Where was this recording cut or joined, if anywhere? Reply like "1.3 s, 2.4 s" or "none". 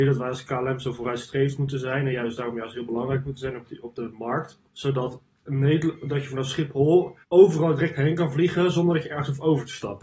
4.7 s, 7.2 s